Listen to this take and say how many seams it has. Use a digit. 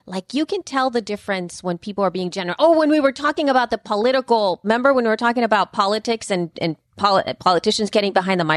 0